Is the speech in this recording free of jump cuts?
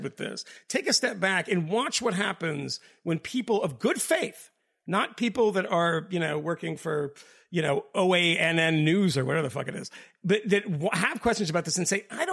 yes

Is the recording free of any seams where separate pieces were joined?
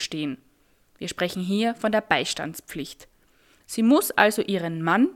yes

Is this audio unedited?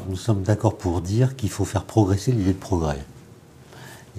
yes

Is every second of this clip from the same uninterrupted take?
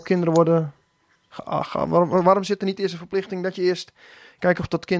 yes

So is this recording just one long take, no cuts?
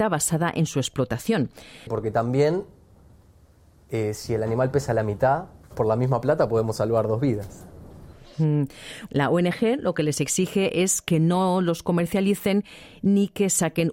no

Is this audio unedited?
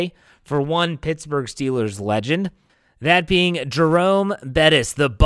yes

